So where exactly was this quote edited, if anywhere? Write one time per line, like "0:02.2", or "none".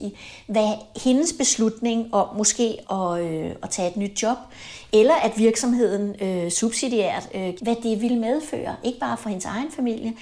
0:02.8
0:07.6